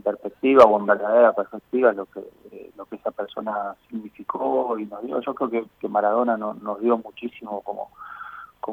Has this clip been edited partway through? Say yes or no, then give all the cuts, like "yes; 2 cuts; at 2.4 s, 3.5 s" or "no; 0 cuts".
no; 0 cuts